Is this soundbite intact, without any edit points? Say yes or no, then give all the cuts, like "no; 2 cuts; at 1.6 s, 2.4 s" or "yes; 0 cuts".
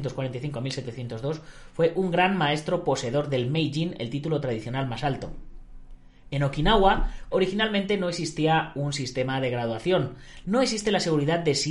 no; 2 cuts; at 7.3 s, 10.4 s